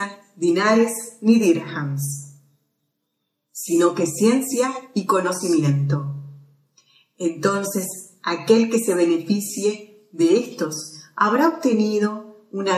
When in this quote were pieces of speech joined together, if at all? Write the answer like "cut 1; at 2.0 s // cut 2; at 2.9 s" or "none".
none